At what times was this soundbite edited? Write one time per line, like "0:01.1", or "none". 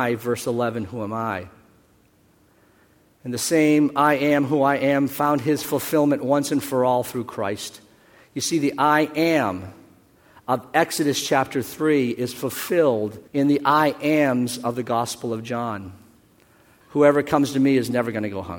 0:13.3
0:16.8